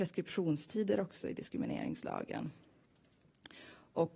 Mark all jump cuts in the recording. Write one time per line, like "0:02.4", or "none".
none